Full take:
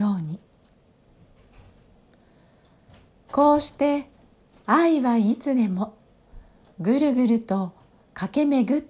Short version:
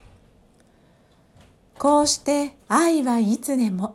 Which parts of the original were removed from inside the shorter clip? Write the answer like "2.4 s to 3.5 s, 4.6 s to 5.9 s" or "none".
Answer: 4.2 s to 4.6 s